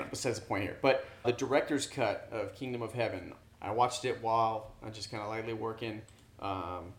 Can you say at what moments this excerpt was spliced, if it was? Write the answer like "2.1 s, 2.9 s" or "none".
1.2 s, 3.4 s